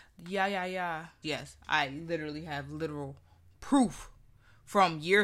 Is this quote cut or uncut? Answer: cut